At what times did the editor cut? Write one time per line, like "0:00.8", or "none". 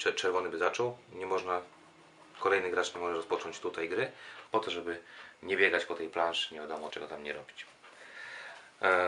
0:04.5
0:06.9